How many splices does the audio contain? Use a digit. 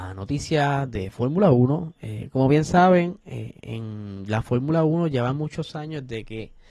0